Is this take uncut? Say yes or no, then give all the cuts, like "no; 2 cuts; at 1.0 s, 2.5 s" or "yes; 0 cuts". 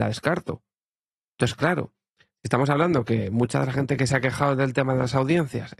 no; 1 cut; at 1.2 s